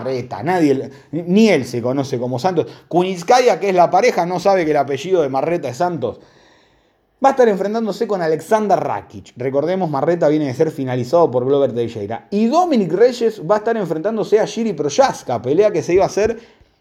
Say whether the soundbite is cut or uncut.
uncut